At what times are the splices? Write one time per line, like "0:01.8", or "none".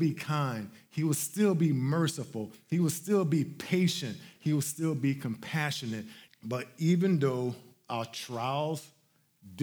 0:04.4
0:06.3